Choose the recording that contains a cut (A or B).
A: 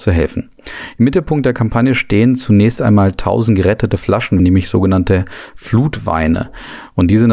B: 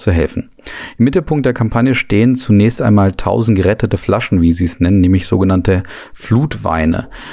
A